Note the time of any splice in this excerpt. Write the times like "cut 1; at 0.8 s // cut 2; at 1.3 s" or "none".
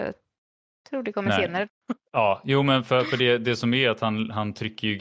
cut 1; at 1.7 s